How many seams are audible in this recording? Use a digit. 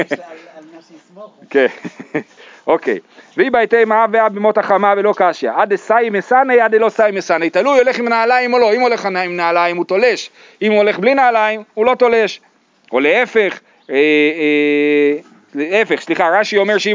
0